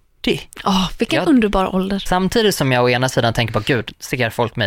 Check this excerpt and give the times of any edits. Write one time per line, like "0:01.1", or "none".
0:02.1